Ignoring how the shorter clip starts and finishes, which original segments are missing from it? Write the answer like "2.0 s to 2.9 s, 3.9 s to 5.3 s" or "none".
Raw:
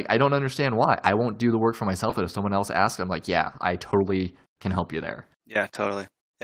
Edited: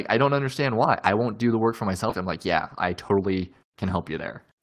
2.1 s to 3.0 s